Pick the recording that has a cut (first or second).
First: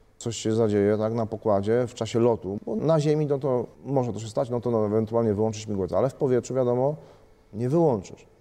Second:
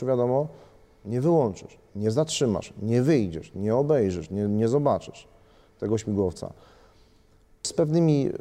first